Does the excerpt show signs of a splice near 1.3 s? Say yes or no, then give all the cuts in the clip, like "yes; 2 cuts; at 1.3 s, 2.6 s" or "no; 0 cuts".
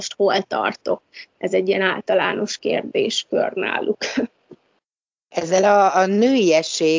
no; 0 cuts